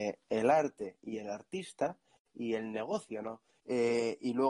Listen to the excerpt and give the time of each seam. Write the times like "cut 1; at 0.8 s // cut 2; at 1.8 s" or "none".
cut 1; at 3.6 s